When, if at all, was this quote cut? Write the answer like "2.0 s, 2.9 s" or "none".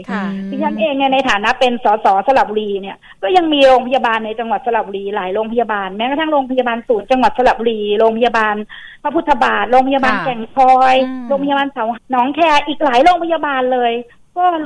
12.0 s

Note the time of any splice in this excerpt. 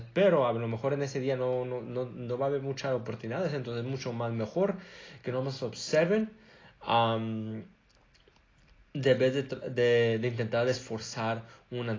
none

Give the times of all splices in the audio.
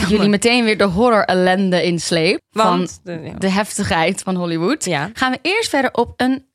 2.4 s

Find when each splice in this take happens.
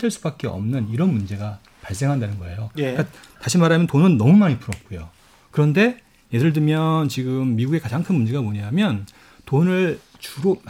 none

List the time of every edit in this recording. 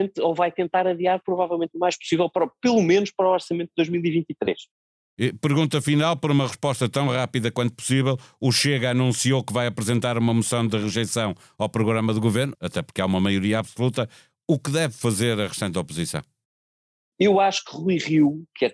12.6 s, 17.1 s

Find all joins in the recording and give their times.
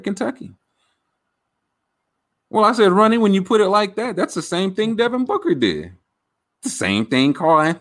none

